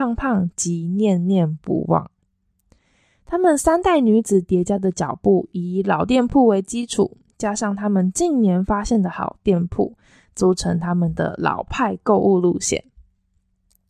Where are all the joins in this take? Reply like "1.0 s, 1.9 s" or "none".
none